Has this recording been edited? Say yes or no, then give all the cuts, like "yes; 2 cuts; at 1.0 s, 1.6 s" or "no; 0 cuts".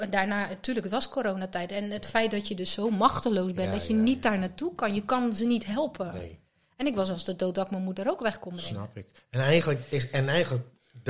no; 0 cuts